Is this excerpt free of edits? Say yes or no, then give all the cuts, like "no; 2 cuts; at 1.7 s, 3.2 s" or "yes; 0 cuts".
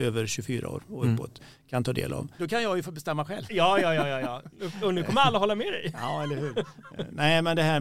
no; 1 cut; at 2.4 s